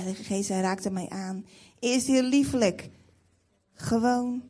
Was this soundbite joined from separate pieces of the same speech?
no; 0 cuts

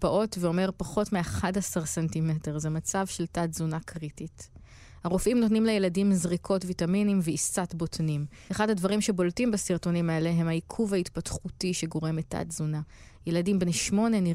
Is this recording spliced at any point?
yes; 1 cut; at 8.5 s

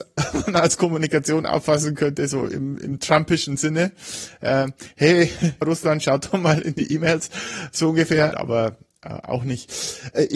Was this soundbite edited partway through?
yes; 2 cuts; at 5.6 s, 8.3 s

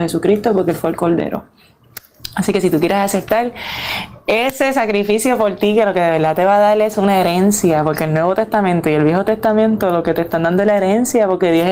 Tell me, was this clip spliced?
no; 0 cuts

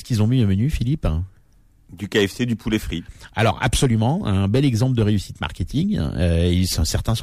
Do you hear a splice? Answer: no; 0 cuts

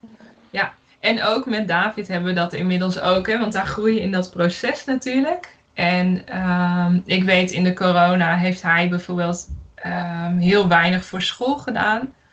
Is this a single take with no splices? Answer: yes; 0 cuts

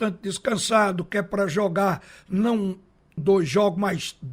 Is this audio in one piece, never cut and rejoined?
no; 1 cut; at 3.2 s

